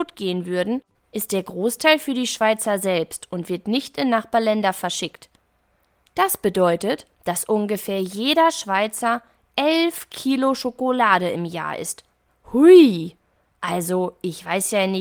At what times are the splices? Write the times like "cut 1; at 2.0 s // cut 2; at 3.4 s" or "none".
none